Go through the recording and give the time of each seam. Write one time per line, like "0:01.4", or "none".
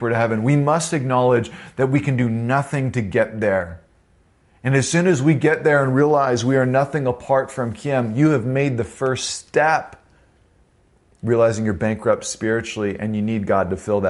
none

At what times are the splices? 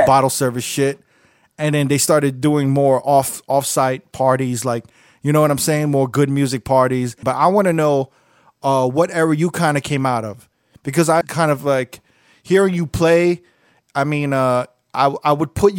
0:07.2
0:11.2

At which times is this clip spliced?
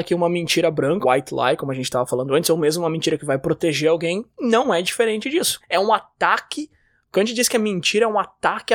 0:01.0
0:05.6

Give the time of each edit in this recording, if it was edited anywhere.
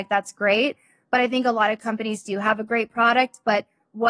none

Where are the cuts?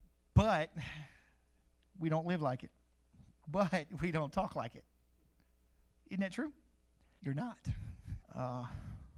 0:07.2
0:08.2

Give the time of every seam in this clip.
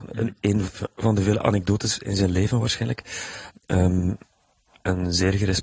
0:03.5

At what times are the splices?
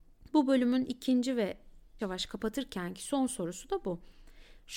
0:02.0

